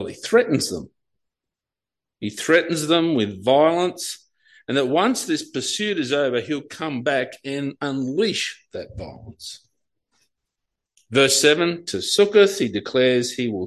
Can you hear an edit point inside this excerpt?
no; 0 cuts

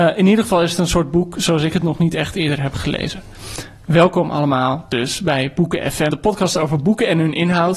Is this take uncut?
no; 1 cut; at 6.1 s

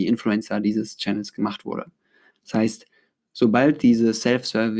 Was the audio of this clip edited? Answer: yes; 1 cut; at 2.3 s

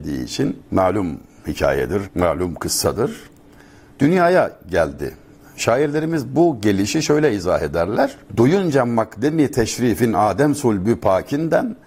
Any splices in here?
yes; 1 cut; at 2.0 s

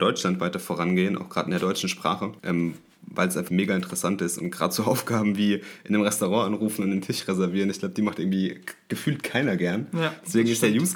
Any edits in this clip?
yes; 2 cuts; at 2.4 s, 3.5 s

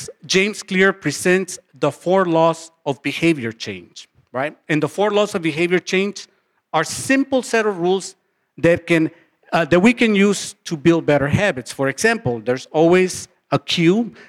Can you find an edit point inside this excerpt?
no; 0 cuts

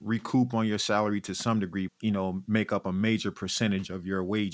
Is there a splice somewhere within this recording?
yes; 1 cut; at 1.9 s

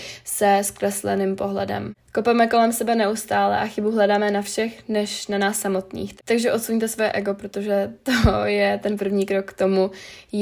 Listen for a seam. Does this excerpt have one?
no; 0 cuts

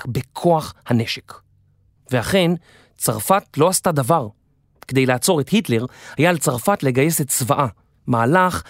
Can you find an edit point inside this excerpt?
yes; 1 cut; at 2.0 s

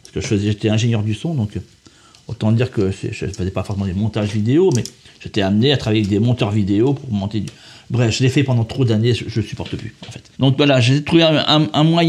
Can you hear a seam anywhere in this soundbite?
yes; 1 cut; at 10.3 s

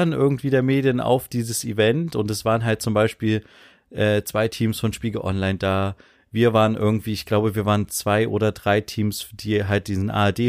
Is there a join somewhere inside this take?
no; 0 cuts

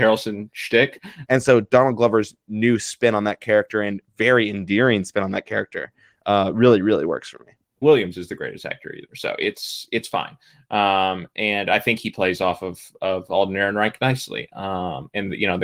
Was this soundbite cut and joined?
yes; 2 cuts; at 1.2 s, 7.8 s

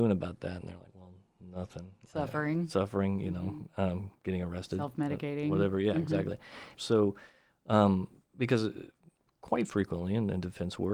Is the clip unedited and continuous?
no; 1 cut; at 6.7 s

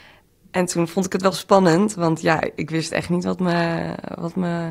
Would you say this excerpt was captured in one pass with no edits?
yes; 0 cuts

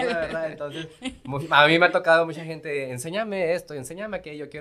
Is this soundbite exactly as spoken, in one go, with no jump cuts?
yes; 0 cuts

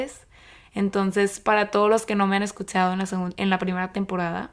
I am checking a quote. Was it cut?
no; 0 cuts

